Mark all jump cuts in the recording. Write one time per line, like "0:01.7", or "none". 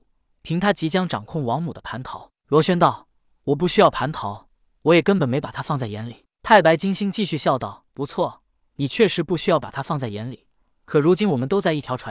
0:07.9